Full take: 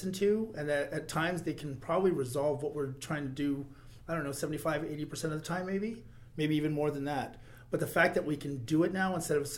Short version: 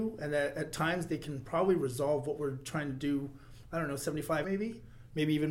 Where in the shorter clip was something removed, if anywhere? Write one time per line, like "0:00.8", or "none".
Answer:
0:04.4